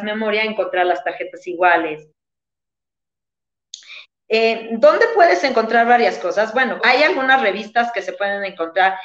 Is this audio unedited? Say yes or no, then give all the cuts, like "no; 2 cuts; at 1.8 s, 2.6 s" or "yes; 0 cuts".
no; 2 cuts; at 4.2 s, 6.8 s